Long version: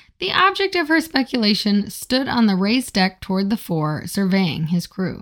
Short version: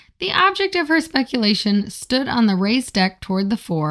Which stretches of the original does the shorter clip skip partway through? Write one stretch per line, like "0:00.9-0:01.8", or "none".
none